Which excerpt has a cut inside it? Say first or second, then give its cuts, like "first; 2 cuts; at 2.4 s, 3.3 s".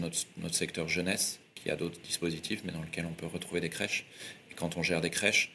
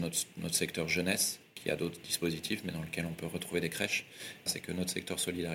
second; 1 cut; at 4.5 s